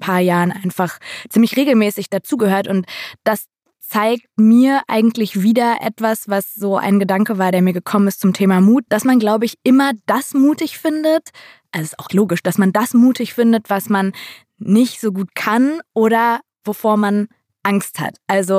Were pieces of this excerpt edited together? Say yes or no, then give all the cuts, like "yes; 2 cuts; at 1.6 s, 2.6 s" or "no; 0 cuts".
yes; 2 cuts; at 8.9 s, 12.1 s